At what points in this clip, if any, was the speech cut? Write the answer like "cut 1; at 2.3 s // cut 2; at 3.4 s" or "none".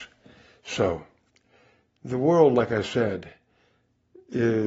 none